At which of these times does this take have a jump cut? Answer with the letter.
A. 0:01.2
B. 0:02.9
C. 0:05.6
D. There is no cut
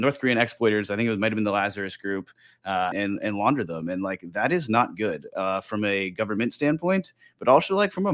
B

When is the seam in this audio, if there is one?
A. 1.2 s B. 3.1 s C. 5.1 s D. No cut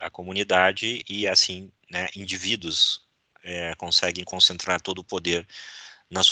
D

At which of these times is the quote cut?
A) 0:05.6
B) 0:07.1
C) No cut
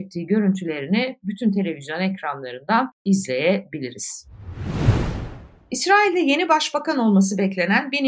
C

